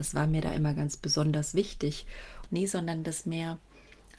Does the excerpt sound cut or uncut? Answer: cut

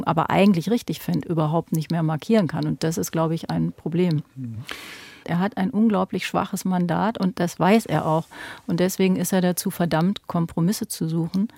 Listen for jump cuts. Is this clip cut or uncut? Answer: cut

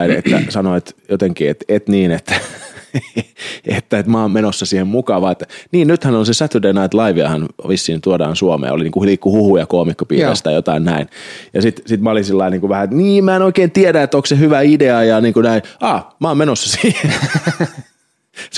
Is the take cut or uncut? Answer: uncut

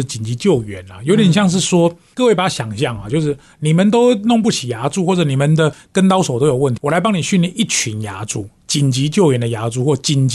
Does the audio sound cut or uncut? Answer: cut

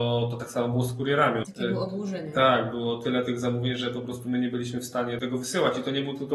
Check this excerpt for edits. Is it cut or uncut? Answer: cut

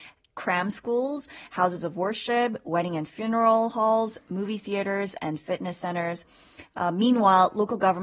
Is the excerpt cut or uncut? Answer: uncut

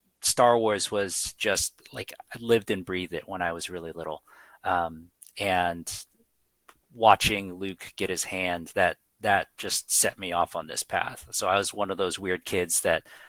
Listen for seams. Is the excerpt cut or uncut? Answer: uncut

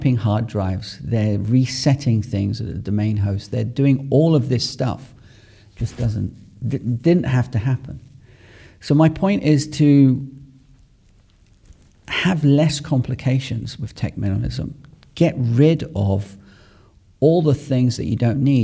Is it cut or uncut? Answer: uncut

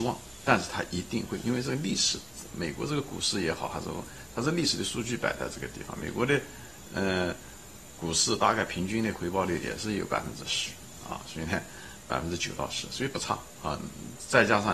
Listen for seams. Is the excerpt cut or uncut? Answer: uncut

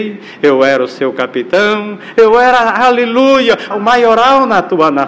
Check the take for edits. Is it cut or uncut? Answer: cut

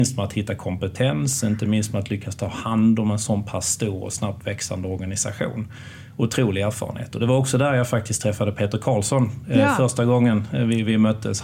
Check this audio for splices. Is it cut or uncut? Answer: uncut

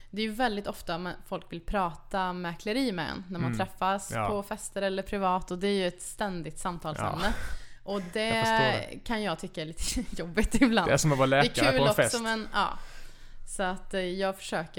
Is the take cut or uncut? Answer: uncut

